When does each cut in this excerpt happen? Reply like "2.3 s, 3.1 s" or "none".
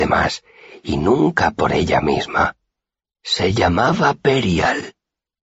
3.0 s